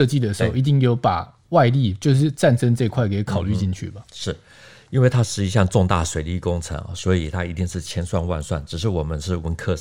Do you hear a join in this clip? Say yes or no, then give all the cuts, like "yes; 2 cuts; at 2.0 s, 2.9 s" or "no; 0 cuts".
no; 0 cuts